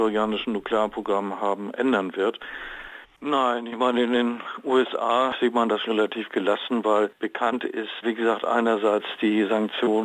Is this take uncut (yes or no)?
no